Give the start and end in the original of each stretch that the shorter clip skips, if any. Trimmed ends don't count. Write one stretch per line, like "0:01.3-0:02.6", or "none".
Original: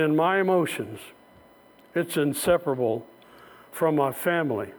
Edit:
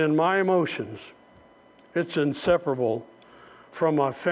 none